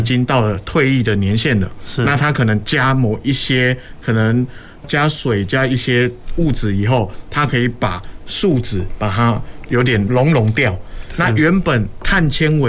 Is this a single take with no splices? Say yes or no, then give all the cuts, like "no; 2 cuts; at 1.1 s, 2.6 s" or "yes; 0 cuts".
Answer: no; 2 cuts; at 4.8 s, 10.1 s